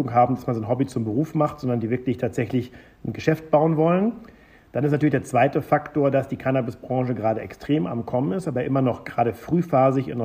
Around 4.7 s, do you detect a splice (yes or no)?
no